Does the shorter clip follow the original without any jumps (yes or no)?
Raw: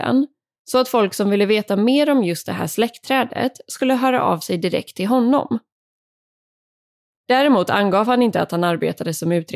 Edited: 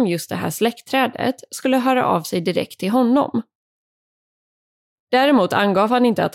yes